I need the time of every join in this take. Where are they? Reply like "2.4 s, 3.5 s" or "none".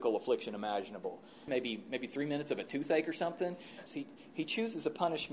1.5 s, 3.9 s